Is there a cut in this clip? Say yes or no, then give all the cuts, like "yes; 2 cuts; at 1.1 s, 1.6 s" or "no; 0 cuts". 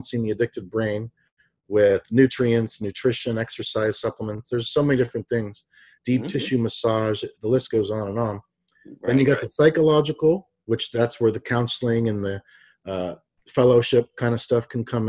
no; 0 cuts